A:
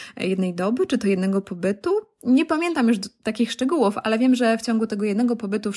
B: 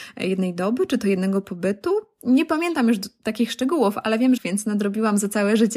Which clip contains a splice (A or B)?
B